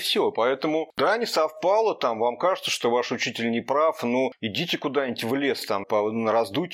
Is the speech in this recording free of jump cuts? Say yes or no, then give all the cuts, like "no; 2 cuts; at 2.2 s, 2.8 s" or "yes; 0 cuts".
no; 1 cut; at 5.8 s